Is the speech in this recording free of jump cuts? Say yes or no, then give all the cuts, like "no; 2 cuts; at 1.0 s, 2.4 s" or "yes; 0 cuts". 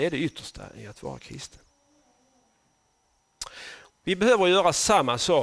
no; 1 cut; at 3.9 s